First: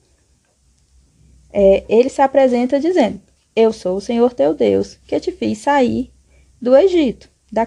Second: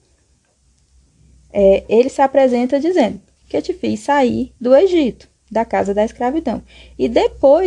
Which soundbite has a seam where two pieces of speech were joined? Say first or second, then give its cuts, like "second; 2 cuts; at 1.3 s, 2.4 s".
second; 2 cuts; at 3.4 s, 4.6 s